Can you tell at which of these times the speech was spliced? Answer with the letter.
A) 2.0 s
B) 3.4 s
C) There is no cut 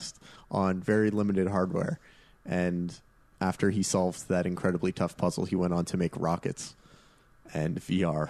C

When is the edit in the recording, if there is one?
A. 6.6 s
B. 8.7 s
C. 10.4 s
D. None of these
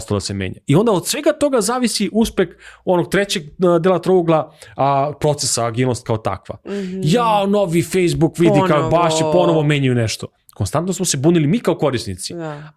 A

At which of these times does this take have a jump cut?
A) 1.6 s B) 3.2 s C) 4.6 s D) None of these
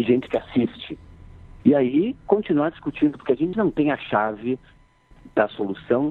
A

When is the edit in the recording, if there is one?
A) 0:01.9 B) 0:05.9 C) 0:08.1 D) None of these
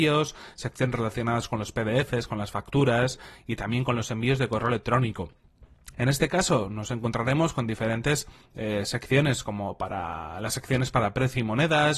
B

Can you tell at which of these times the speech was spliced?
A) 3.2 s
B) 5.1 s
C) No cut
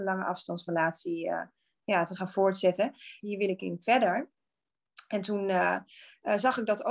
A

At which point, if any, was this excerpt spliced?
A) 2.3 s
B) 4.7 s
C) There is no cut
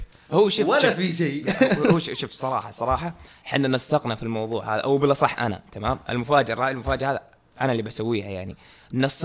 C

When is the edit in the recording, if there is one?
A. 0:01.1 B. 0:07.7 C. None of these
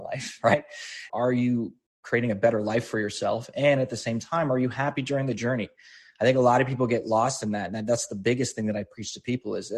A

